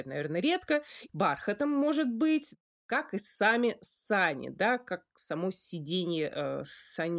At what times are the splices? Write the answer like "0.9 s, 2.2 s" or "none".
1.1 s